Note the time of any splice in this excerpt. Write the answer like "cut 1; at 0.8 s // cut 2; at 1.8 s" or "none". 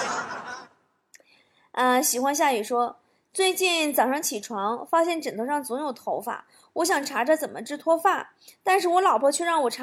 none